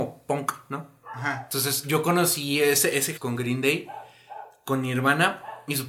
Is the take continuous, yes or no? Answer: no